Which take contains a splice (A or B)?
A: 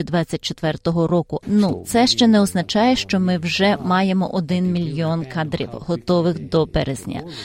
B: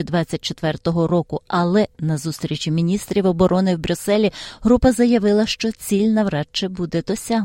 A